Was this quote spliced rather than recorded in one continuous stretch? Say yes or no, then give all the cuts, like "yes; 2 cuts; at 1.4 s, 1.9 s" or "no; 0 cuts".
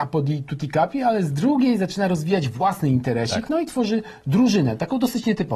no; 0 cuts